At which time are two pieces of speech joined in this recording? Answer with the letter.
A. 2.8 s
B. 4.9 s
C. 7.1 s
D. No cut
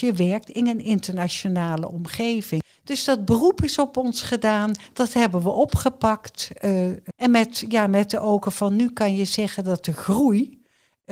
C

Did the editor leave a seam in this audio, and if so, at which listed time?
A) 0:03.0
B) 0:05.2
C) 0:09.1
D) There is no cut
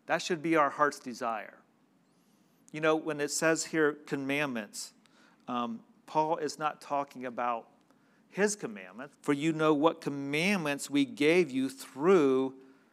C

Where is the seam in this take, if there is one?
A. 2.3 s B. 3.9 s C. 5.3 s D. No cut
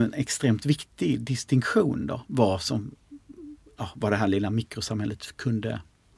D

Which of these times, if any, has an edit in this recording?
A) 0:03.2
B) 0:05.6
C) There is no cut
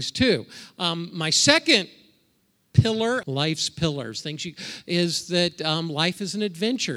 A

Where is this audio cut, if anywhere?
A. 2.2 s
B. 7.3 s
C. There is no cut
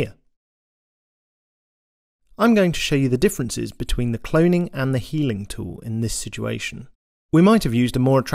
B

